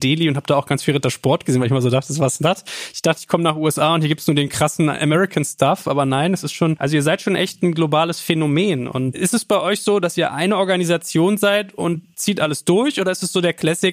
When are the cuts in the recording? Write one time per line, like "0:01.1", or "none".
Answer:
none